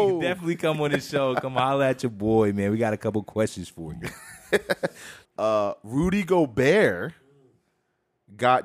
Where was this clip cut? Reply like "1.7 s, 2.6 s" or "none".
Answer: 5.3 s